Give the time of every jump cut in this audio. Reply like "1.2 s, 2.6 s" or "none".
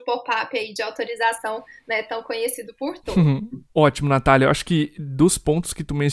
3.7 s